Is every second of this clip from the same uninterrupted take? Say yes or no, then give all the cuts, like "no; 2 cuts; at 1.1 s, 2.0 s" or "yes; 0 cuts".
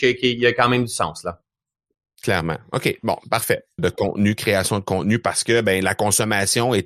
no; 1 cut; at 3.8 s